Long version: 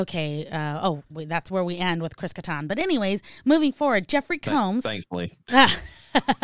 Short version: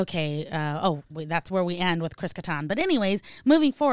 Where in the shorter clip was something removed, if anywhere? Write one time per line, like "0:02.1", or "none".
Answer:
none